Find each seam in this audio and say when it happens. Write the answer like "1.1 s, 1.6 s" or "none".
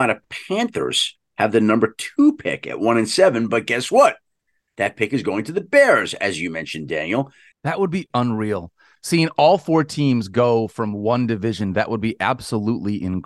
7.5 s